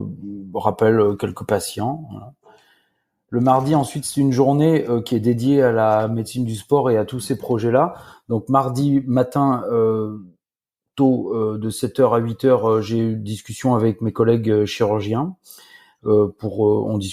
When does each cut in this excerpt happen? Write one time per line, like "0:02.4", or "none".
none